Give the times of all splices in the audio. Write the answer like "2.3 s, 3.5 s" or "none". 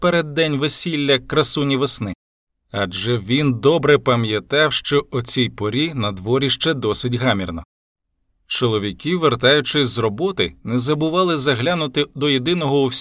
none